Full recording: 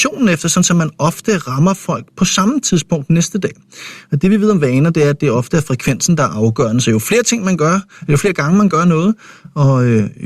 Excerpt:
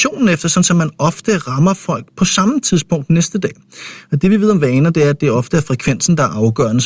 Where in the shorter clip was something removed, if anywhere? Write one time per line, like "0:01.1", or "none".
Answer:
none